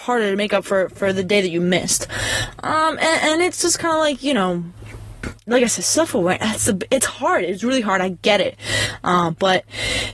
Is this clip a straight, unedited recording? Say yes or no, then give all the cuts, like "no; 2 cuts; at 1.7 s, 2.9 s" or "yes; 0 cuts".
yes; 0 cuts